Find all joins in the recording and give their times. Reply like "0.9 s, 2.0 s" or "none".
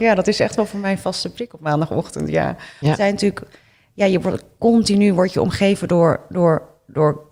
2.8 s